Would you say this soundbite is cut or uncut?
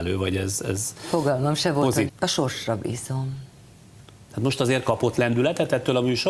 cut